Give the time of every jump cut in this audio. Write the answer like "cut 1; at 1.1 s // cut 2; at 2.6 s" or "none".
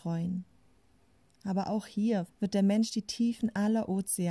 cut 1; at 2.3 s

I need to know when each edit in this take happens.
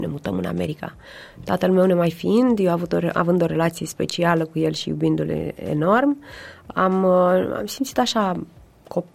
none

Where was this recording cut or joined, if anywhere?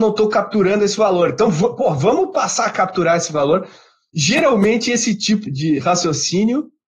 cut 1; at 5.5 s

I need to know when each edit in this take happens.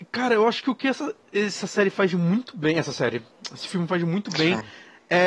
none

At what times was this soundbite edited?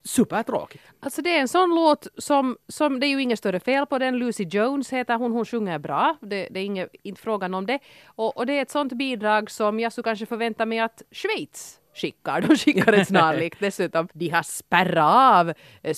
cut 1; at 14.1 s

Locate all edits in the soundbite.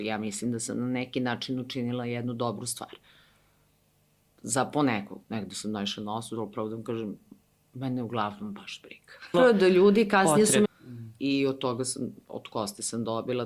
cut 1; at 9.3 s // cut 2; at 10.6 s

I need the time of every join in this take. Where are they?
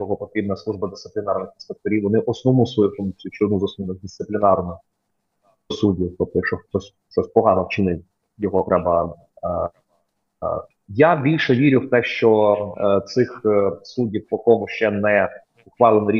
cut 1; at 10.7 s

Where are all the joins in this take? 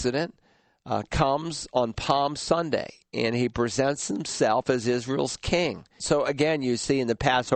cut 1; at 6.0 s

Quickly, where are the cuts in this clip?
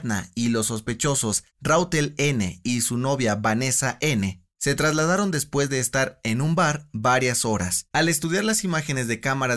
cut 1; at 7.9 s

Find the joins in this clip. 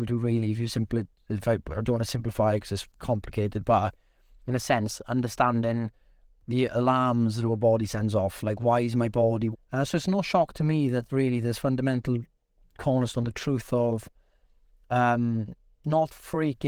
cut 1; at 2.9 s // cut 2; at 9.5 s

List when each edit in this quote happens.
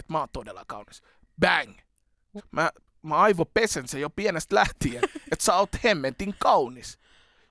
cut 1; at 2.4 s

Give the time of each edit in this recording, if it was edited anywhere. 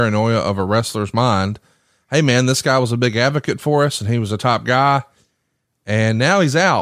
none

